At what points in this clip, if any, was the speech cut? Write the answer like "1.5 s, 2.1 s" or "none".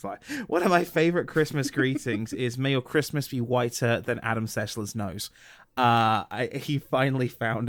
none